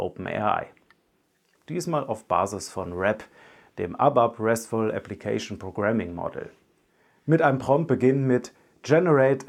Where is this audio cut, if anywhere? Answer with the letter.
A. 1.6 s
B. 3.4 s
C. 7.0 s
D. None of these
A